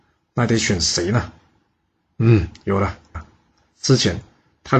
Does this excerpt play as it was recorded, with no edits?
no; 1 cut; at 3.1 s

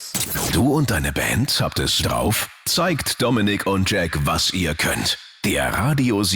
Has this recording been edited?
yes; 1 cut; at 2.0 s

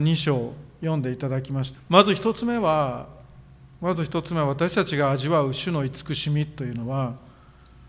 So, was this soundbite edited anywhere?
yes; 2 cuts; at 1.7 s, 3.7 s

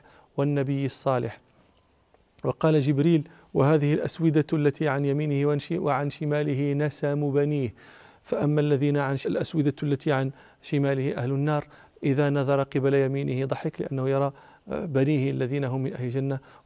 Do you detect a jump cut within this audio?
yes; 1 cut; at 9.2 s

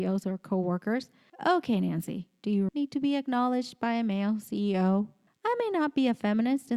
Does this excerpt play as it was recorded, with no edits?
no; 3 cuts; at 1.3 s, 2.7 s, 5.3 s

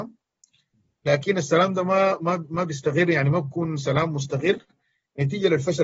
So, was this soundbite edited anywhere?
no; 0 cuts

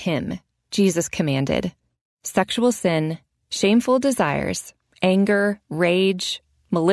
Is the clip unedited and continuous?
no; 1 cut; at 2.0 s

